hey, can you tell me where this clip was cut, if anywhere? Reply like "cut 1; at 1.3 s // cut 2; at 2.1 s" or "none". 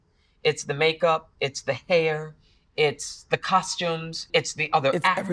cut 1; at 4.3 s